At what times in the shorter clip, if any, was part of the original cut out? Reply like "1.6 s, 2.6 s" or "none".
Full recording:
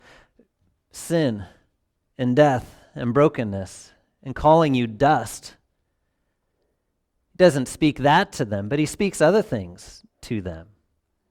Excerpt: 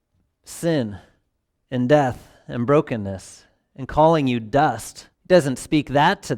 5.1 s